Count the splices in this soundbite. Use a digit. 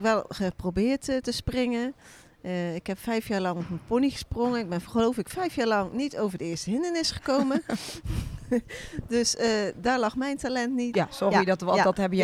1